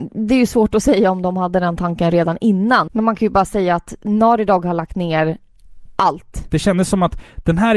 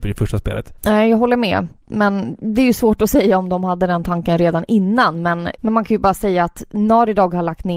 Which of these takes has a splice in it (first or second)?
first